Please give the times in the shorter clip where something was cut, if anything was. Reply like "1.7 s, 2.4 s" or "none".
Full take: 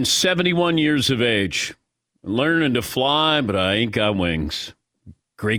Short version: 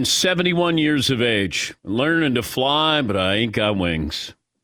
1.8 s